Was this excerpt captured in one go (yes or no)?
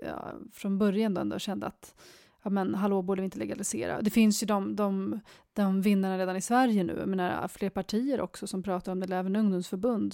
yes